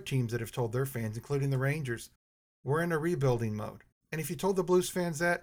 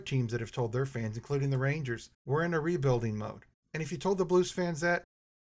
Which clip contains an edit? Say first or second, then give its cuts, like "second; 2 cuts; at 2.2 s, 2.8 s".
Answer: second; 1 cut; at 2.1 s